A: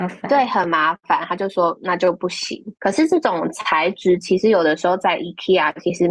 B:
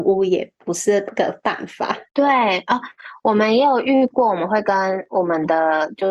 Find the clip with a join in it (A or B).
A